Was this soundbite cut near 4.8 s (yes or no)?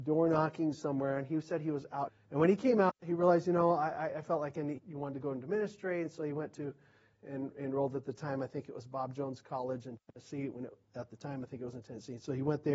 yes